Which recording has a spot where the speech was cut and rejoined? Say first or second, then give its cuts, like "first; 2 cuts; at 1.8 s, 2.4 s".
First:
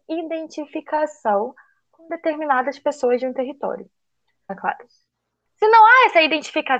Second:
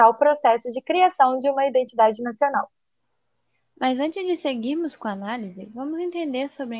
first; 1 cut; at 4.5 s